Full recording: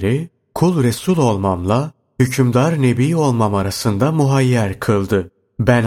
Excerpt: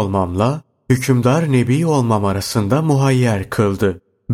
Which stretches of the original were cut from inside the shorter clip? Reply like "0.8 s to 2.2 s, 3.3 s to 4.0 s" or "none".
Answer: none